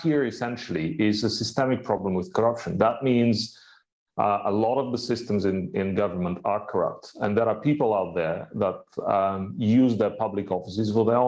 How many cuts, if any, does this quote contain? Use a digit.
0